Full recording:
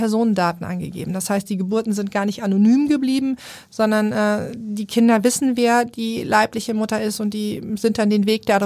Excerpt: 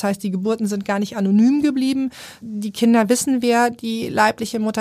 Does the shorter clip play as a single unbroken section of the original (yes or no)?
no